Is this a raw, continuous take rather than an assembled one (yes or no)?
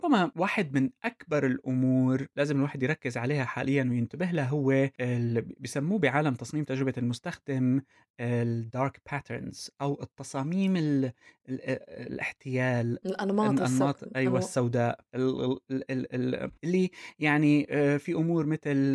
no